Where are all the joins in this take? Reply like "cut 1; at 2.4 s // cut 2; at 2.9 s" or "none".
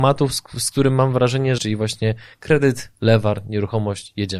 cut 1; at 1.6 s